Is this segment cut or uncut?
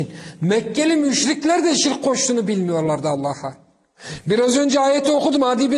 uncut